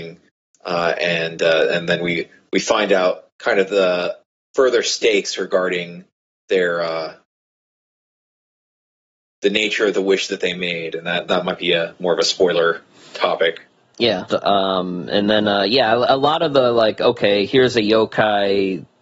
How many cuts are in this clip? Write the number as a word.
one